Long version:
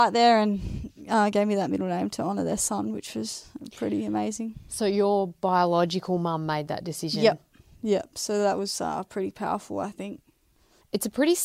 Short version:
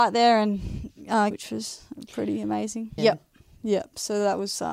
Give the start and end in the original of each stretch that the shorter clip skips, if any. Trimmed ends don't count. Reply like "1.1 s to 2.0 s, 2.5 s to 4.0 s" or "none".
1.3 s to 2.9 s, 4.6 s to 7.2 s